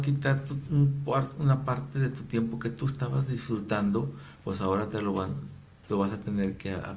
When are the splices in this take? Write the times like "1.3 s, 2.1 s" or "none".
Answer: none